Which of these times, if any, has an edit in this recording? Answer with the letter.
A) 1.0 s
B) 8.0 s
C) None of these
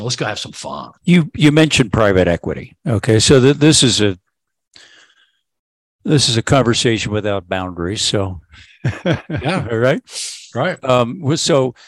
A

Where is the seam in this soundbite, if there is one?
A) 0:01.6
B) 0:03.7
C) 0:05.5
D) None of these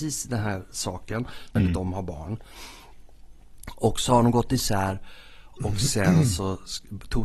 A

